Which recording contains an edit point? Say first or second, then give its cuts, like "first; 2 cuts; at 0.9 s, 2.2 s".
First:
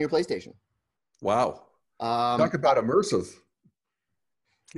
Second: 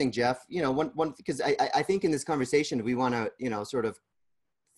first; 1 cut; at 3.6 s